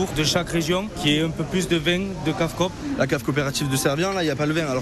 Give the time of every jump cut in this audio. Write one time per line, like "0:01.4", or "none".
none